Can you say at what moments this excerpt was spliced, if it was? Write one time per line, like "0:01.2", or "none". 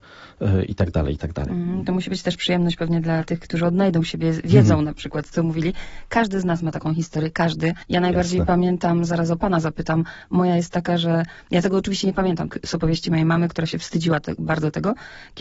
0:12.5

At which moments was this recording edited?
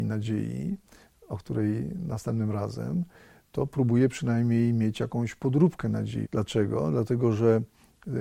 0:06.2

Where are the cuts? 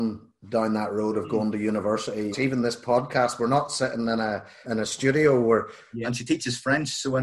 0:02.3
0:04.6
0:06.0

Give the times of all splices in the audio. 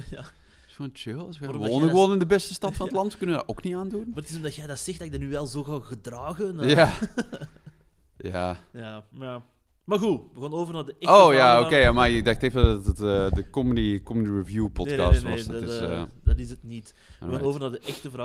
none

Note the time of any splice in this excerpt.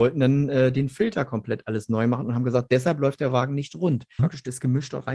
0:04.2

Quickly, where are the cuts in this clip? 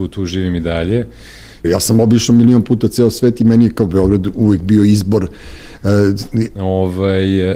0:01.6
0:06.6

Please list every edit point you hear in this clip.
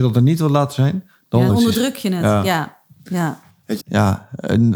0:01.5
0:03.8

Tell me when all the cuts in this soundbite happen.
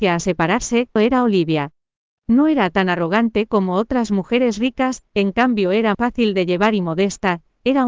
0:01.0
0:05.9

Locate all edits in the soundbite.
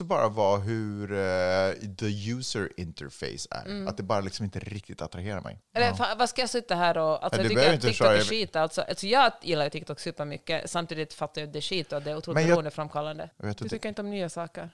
0:05.6
0:13.3

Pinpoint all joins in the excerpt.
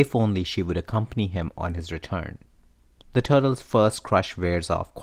0:03.0

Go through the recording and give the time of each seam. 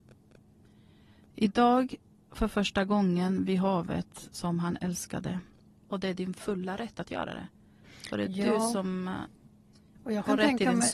0:05.7

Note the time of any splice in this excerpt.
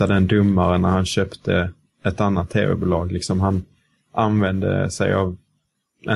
none

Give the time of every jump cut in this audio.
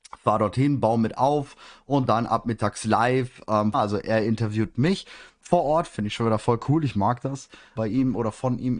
0:03.7
0:07.8

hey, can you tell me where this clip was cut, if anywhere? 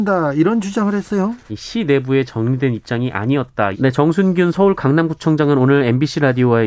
0:01.5
0:03.7

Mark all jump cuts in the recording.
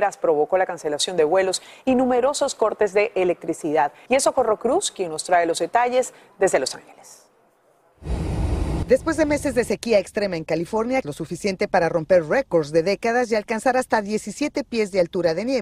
0:04.1
0:11.0

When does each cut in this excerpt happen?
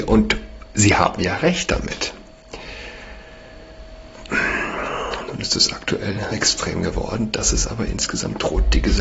0:06.3

